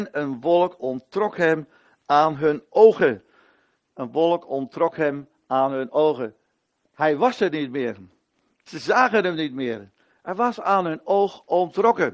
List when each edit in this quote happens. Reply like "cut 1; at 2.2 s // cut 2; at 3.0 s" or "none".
none